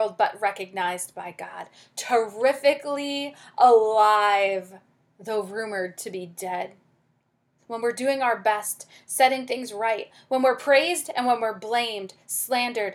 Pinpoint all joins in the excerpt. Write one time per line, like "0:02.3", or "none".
0:07.6

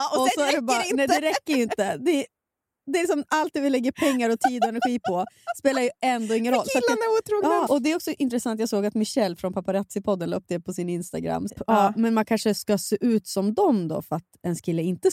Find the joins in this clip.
0:07.7
0:11.5

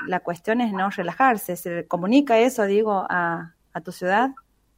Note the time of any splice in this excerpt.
none

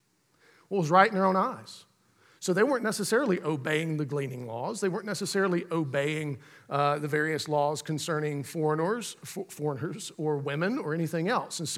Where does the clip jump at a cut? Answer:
none

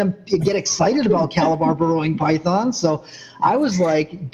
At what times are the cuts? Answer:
none

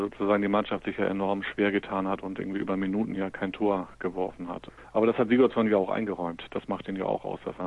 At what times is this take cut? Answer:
none

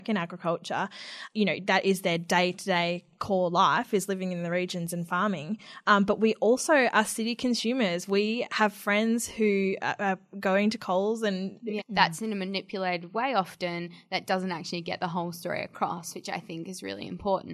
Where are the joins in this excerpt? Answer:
0:01.3
0:11.8

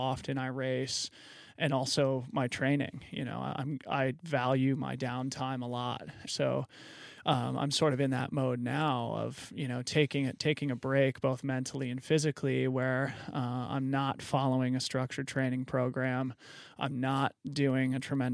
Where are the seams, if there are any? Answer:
0:06.3

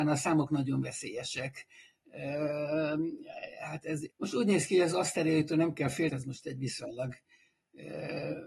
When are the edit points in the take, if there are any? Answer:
0:04.1
0:06.1

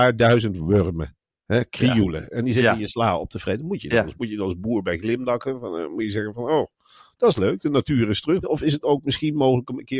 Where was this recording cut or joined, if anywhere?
0:04.1
0:08.4

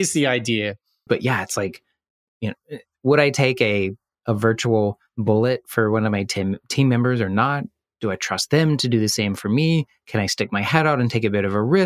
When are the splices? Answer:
0:01.1

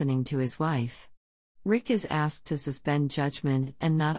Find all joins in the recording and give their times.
none

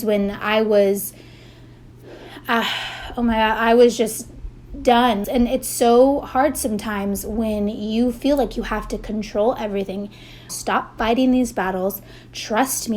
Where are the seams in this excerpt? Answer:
0:05.2
0:10.5

